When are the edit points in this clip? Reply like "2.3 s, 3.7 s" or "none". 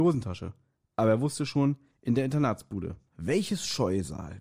1.9 s, 3.1 s